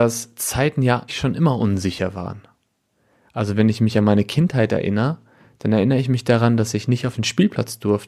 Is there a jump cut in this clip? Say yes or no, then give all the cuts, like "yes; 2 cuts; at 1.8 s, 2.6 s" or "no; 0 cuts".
yes; 1 cut; at 1.1 s